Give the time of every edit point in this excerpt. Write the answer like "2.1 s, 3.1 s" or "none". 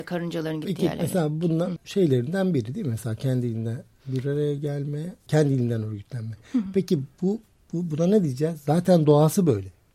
1.8 s, 5.3 s